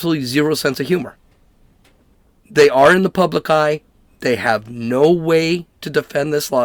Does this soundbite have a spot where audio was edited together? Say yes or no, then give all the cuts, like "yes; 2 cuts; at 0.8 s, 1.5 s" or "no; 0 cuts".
no; 0 cuts